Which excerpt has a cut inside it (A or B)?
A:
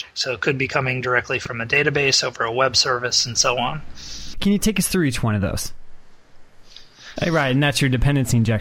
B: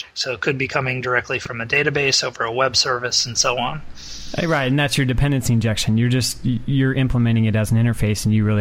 A